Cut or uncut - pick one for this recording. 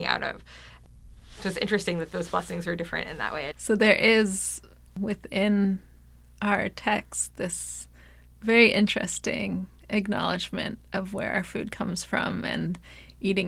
cut